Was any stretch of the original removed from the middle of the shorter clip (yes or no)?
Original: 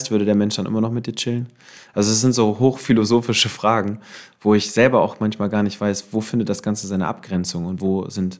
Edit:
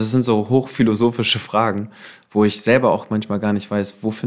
no